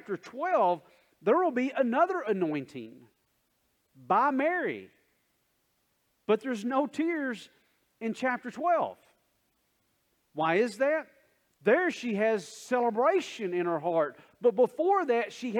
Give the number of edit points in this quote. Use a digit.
1